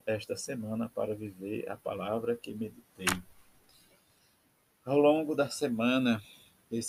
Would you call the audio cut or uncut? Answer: uncut